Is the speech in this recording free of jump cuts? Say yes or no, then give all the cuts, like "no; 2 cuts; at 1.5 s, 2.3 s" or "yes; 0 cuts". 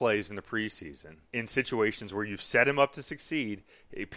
no; 1 cut; at 1.3 s